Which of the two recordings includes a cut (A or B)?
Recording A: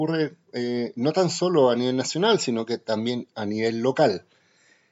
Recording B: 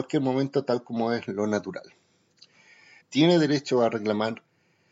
B